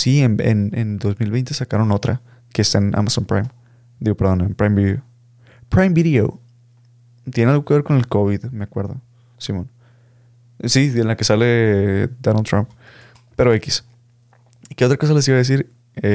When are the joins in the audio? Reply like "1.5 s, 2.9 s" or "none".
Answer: none